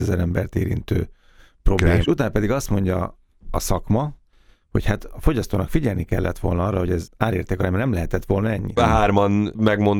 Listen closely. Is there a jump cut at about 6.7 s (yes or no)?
no